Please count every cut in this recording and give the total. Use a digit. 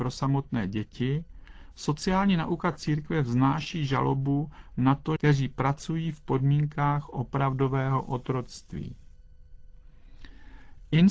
1